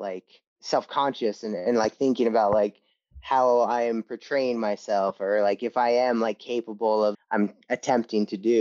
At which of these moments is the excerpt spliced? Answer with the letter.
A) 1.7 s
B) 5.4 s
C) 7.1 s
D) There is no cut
C